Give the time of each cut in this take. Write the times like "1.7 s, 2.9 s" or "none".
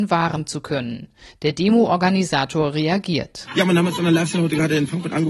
none